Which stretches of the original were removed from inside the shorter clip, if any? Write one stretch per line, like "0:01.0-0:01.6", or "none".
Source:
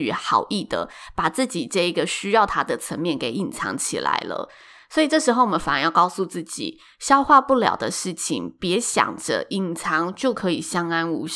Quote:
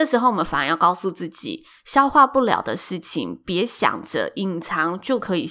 none